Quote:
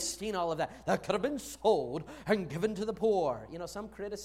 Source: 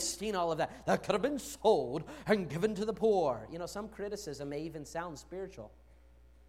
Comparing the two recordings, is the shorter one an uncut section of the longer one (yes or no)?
yes